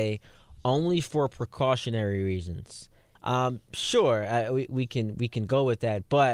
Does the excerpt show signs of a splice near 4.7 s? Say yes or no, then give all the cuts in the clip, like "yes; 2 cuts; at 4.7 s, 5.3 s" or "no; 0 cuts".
yes; 2 cuts; at 3.1 s, 4.7 s